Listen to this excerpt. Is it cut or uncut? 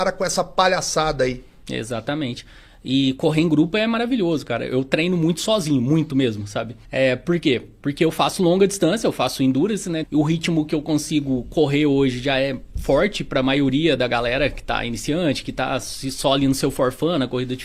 cut